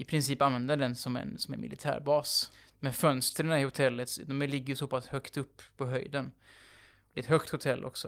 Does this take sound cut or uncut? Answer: uncut